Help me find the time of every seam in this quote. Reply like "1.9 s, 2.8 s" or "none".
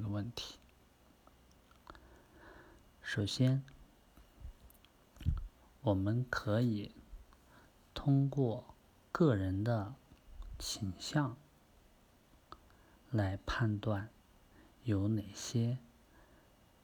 none